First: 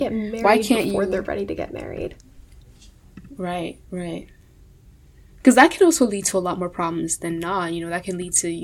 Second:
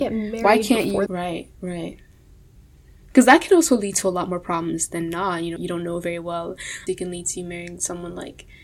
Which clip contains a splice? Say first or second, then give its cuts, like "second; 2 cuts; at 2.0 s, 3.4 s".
second; 3 cuts; at 1.1 s, 5.6 s, 6.9 s